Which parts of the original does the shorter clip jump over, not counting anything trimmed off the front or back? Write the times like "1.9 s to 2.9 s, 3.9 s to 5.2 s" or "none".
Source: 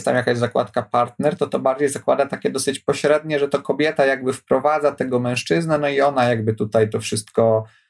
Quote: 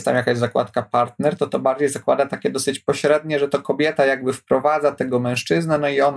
none